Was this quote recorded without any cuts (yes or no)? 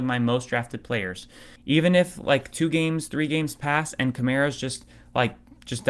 no